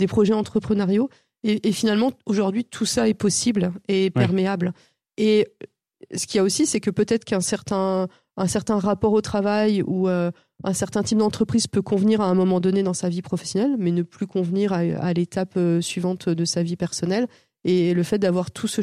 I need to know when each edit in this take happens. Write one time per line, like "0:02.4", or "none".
0:05.0

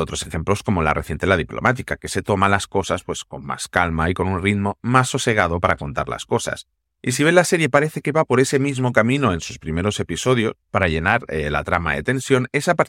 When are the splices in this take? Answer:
none

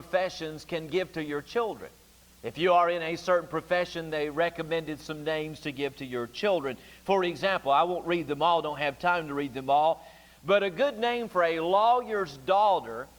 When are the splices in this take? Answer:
none

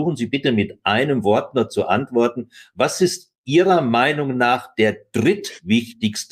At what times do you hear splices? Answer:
none

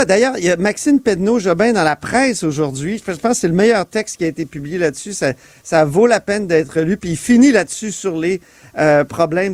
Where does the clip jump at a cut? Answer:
none

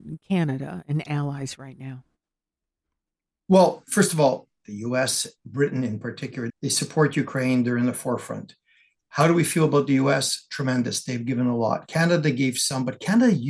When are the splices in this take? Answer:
0:04.6
0:06.5

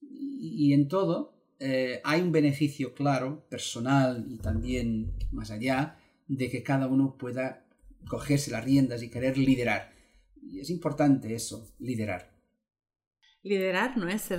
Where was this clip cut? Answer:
none

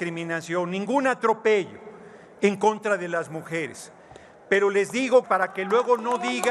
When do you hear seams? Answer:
0:05.2

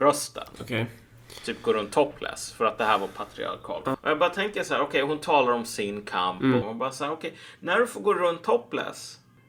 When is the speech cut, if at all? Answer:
0:03.9
0:06.6

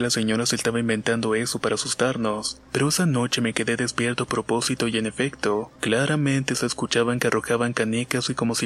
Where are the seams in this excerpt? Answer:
0:02.6
0:05.8

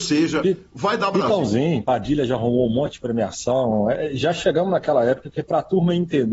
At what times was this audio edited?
0:01.8

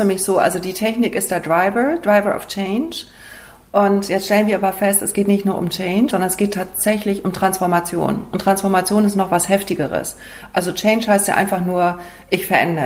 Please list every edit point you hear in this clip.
0:06.1

